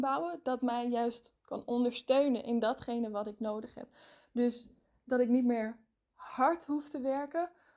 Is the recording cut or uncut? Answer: uncut